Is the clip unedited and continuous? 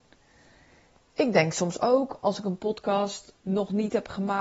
yes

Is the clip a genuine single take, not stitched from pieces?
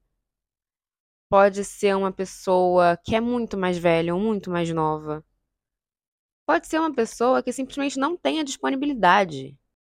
yes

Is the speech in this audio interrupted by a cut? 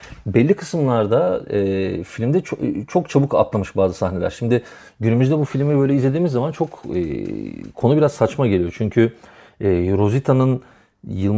no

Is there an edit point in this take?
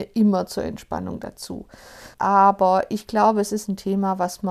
yes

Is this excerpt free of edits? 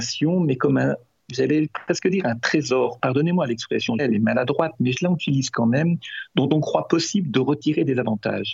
no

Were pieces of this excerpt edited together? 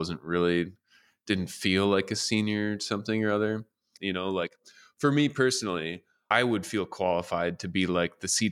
yes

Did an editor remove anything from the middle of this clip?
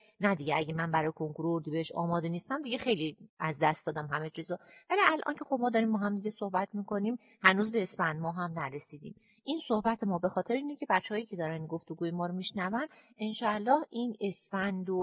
yes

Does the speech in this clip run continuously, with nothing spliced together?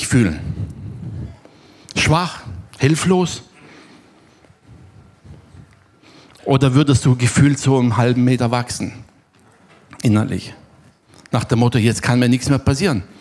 yes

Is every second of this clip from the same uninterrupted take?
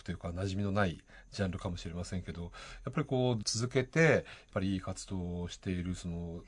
no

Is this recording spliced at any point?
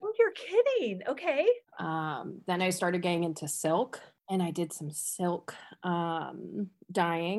yes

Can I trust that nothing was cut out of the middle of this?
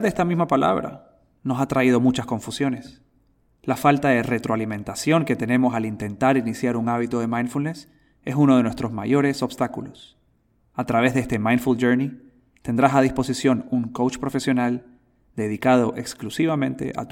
no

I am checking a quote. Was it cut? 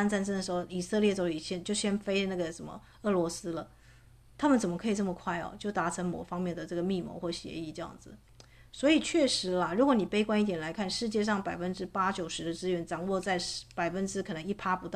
no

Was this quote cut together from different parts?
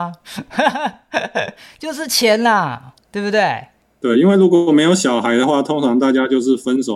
no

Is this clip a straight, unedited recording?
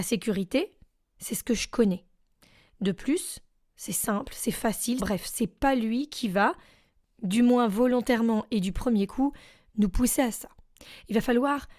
no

